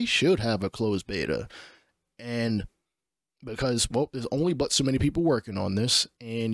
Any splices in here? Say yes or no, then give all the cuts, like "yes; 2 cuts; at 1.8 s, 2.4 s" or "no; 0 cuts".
no; 0 cuts